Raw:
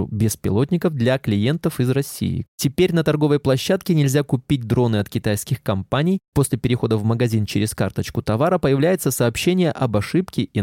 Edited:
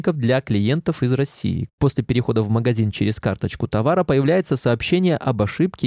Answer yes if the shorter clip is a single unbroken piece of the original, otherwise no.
no